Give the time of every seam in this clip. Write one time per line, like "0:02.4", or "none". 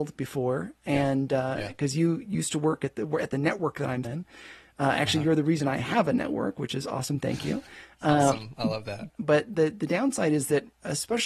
0:04.0
0:09.1

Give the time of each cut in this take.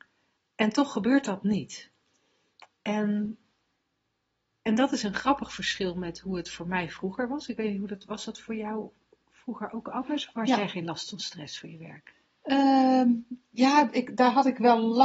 none

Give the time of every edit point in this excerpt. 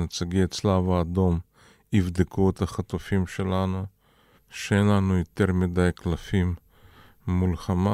0:04.4

